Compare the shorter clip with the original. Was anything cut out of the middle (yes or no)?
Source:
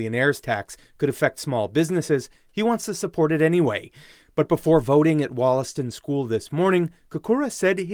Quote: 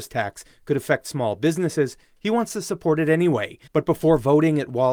yes